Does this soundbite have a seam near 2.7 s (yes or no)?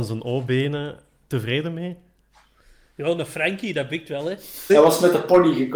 no